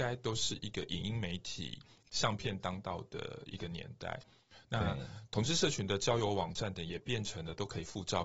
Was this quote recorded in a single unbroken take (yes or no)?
no